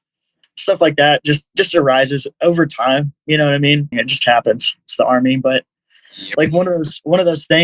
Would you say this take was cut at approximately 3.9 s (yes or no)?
yes